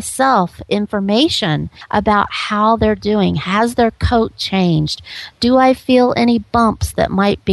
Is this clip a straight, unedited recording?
yes; 0 cuts

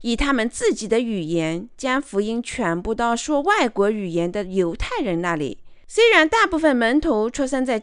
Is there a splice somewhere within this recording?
yes; 1 cut; at 5.8 s

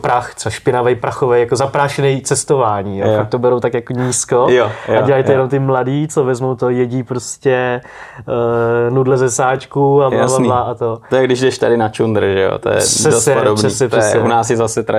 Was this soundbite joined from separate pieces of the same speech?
no; 0 cuts

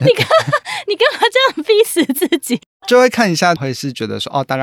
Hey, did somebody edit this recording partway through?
yes; 1 cut; at 3.6 s

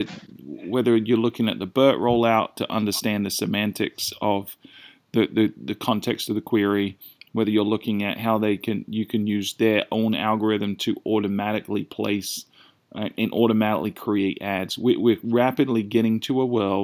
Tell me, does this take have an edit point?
no; 0 cuts

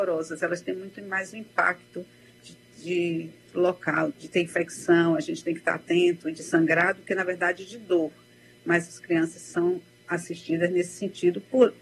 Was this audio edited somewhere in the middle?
yes; 1 cut; at 4.1 s

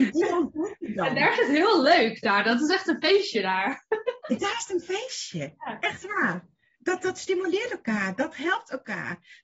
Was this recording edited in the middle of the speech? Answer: no; 0 cuts

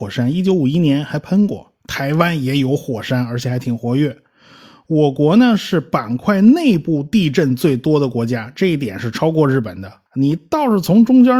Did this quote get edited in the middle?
yes; 1 cut; at 10.1 s

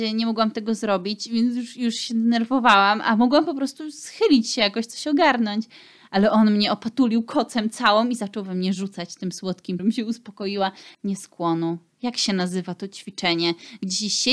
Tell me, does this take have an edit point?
yes; 2 cuts; at 9.8 s, 10.9 s

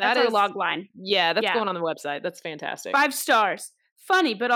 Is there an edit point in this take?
no; 0 cuts

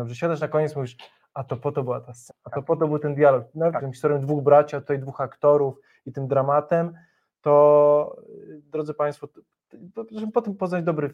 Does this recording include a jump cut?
yes; 2 cuts; at 2.3 s, 3.8 s

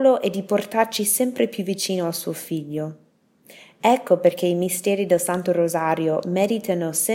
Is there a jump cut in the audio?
no; 0 cuts

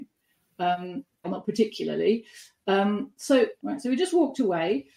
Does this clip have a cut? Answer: yes; 2 cuts; at 1.2 s, 3.6 s

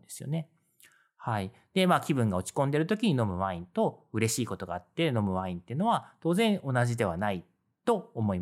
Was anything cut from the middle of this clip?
no; 0 cuts

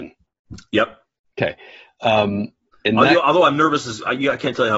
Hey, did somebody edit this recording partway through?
no; 0 cuts

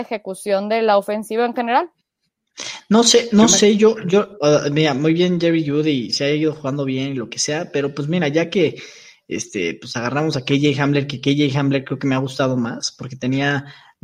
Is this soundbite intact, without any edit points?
yes; 0 cuts

